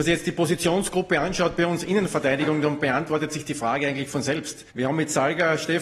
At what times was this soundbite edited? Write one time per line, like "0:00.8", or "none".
0:04.7